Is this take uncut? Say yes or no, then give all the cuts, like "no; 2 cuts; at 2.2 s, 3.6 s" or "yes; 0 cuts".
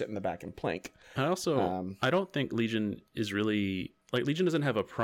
yes; 0 cuts